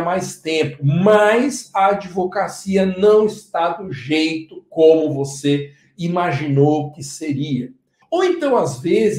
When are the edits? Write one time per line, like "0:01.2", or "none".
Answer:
0:08.0